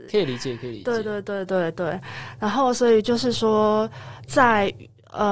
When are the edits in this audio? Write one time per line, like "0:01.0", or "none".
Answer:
none